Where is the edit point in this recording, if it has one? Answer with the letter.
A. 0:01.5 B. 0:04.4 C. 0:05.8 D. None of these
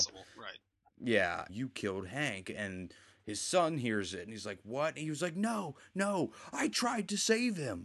A